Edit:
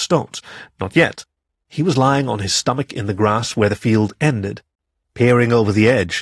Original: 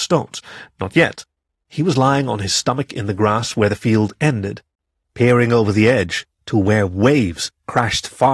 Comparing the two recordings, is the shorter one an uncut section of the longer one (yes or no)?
yes